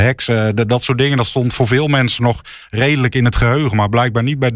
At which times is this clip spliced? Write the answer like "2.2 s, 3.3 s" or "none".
none

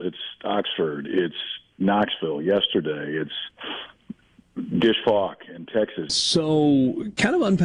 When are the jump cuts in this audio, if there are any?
6.1 s

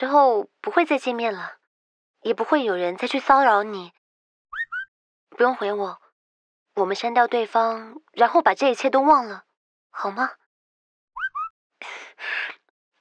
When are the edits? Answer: none

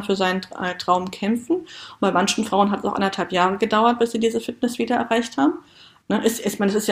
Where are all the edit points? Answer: 6.0 s

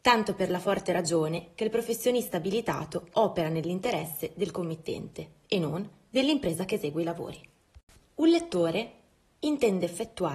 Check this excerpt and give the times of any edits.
8.1 s

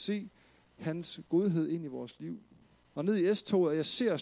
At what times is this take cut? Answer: 2.9 s

